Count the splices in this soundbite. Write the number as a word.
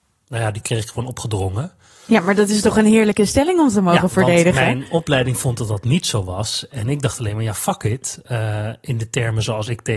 zero